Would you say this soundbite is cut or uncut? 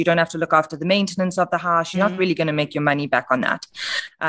cut